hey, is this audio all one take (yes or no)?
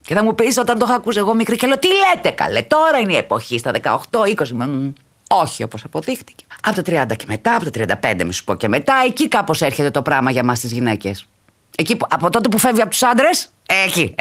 yes